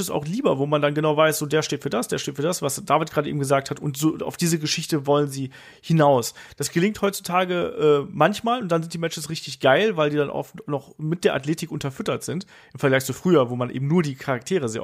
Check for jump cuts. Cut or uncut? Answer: uncut